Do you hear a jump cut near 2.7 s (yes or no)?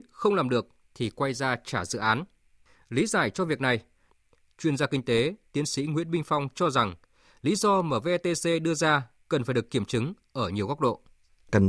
no